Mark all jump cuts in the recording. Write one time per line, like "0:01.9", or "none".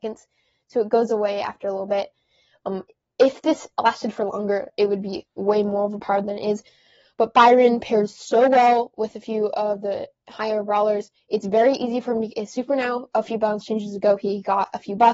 none